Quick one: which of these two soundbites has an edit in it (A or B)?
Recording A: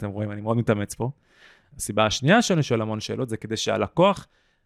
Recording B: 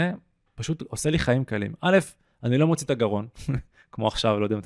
A